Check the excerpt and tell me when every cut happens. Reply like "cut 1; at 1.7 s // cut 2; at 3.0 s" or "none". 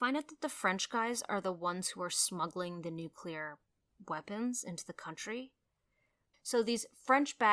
cut 1; at 6.3 s